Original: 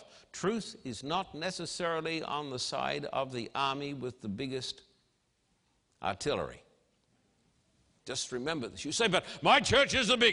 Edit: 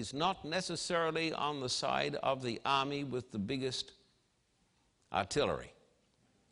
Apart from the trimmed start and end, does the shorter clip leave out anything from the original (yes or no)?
no